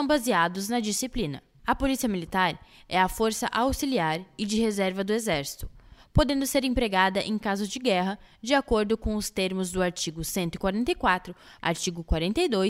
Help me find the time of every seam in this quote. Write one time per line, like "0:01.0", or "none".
0:01.5
0:11.6

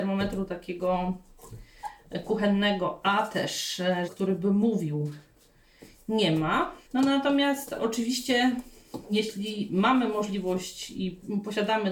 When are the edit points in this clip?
0:04.1
0:06.9

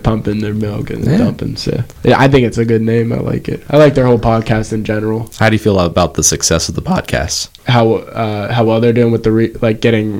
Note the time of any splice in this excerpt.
0:07.6

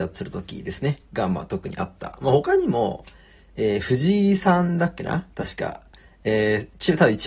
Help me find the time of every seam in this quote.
none

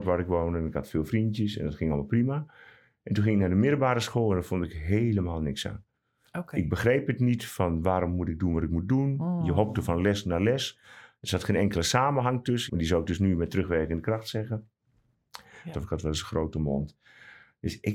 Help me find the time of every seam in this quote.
0:12.7
0:15.7

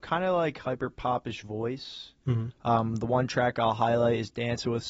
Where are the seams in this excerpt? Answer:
none

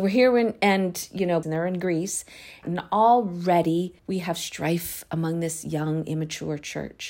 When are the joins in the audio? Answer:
0:01.4
0:02.6
0:04.0

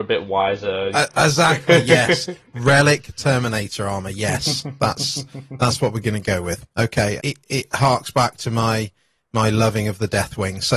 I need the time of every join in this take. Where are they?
0:00.9
0:07.2

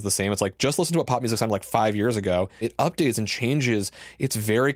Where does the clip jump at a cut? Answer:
0:02.6

